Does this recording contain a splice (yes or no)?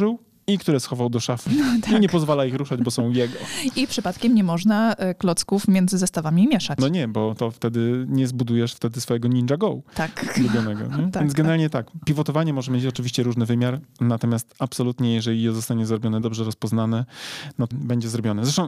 yes